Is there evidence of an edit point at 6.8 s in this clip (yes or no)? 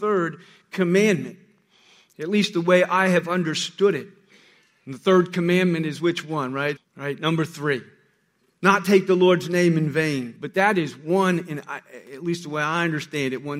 yes